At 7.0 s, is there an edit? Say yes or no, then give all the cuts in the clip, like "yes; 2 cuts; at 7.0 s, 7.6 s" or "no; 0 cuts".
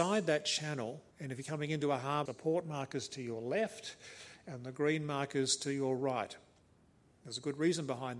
no; 2 cuts; at 1.1 s, 2.3 s